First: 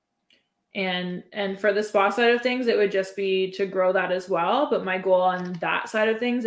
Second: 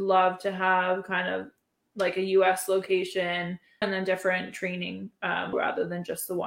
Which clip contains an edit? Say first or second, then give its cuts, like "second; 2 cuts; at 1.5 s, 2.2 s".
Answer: second; 2 cuts; at 3.8 s, 5.5 s